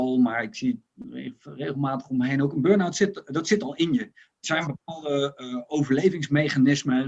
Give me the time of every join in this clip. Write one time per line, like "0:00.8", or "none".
none